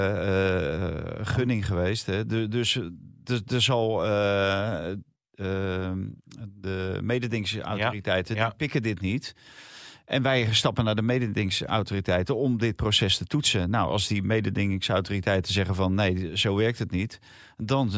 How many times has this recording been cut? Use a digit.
1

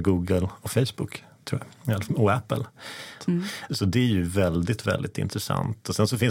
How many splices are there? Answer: 2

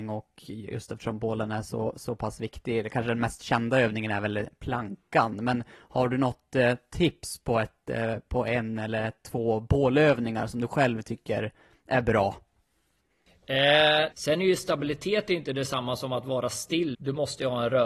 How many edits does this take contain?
2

